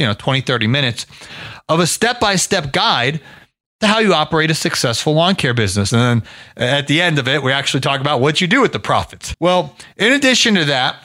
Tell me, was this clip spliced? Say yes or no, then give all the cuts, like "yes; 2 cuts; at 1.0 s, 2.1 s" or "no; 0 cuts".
yes; 2 cuts; at 5.9 s, 9.3 s